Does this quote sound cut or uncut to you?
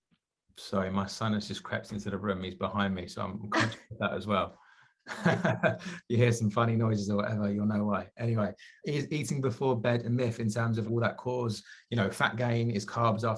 cut